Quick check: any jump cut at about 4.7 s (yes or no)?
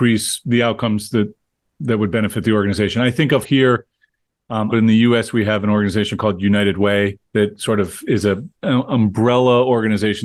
yes